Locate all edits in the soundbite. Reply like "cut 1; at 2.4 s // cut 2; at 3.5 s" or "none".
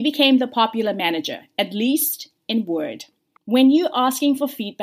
cut 1; at 3.4 s